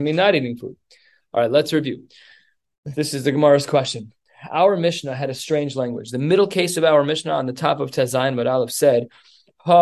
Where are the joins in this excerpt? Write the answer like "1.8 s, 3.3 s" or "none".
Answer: none